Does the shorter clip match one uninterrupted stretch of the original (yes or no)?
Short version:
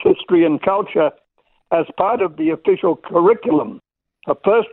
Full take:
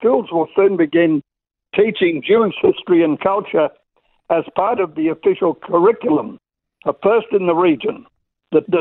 yes